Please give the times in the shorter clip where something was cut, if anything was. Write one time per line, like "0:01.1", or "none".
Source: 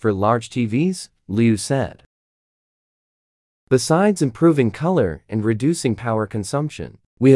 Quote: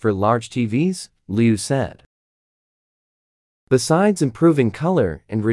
none